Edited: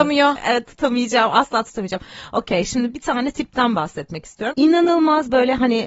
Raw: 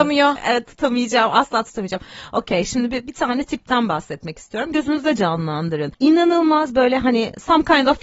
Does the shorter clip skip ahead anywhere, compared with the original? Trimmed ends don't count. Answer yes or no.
yes